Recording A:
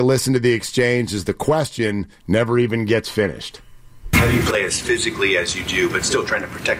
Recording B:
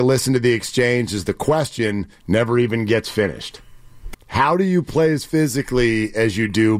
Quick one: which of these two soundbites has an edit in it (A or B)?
B